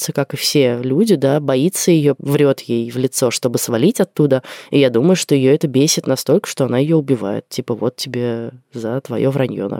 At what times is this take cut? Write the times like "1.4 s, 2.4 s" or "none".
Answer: 2.2 s

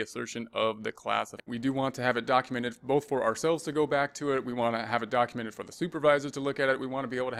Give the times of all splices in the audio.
1.5 s

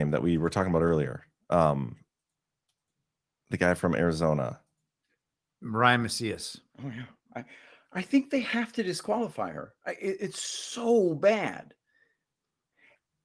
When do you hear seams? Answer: 6.7 s

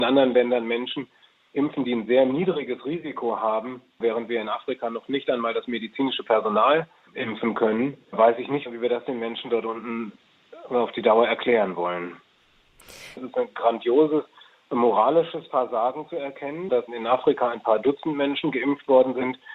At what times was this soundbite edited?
4.0 s, 13.2 s, 16.7 s

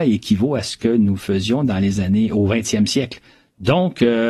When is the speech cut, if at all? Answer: none

